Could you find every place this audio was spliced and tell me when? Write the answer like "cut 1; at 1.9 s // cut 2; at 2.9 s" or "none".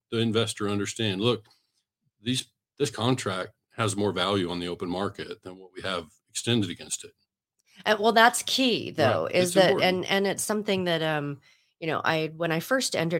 none